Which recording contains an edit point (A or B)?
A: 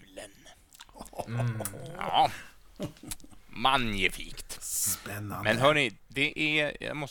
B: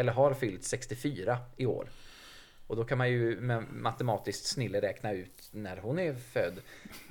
A